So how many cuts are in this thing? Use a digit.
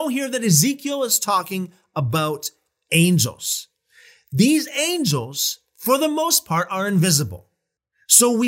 0